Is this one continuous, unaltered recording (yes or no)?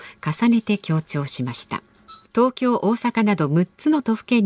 no